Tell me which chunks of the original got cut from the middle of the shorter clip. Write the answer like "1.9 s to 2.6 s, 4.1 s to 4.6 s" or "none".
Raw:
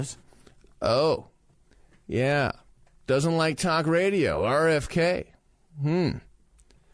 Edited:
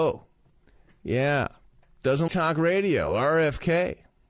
3.3 s to 3.6 s